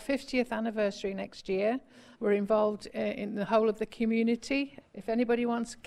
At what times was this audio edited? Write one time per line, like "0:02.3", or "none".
0:02.1
0:04.8